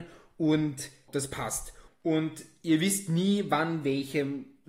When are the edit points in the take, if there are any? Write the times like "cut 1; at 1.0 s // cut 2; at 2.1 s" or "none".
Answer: cut 1; at 1.9 s